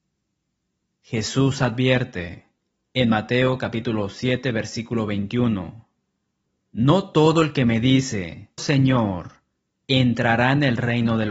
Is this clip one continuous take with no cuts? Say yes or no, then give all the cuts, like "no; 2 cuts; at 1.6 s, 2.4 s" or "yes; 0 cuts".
no; 1 cut; at 8.6 s